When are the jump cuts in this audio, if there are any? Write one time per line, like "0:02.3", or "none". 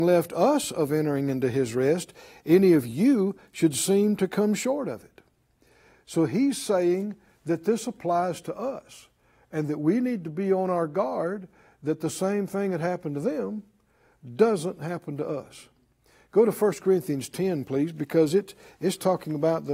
none

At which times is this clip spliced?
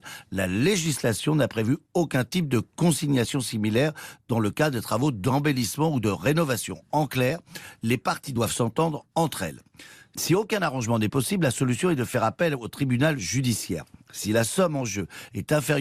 none

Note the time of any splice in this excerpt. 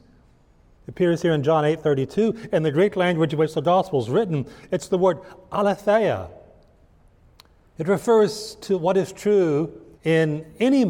0:10.0

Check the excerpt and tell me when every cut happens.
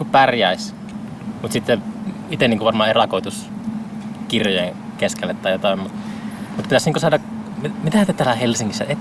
none

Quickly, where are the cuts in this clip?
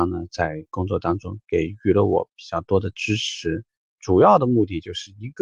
0:03.8

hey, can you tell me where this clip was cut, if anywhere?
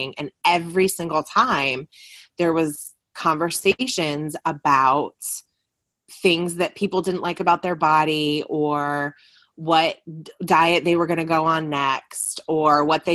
none

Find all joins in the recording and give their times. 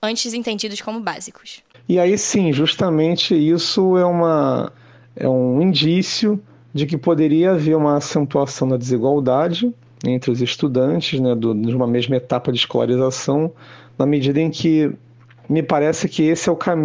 none

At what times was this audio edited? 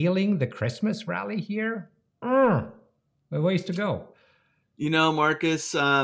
none

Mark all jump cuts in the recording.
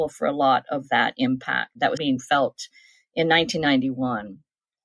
0:02.0

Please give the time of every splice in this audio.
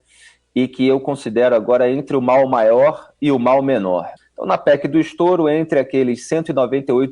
0:04.2

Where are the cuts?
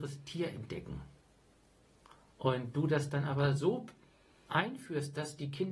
none

